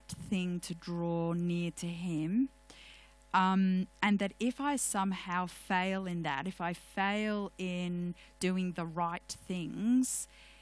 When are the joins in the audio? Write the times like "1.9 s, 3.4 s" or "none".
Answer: none